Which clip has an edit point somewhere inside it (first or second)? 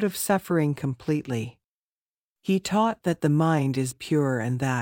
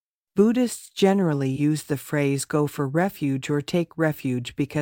first